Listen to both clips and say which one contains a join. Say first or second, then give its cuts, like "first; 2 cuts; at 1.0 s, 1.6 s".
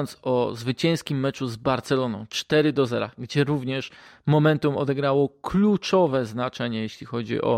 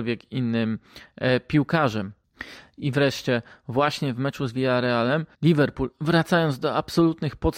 second; 1 cut; at 5.3 s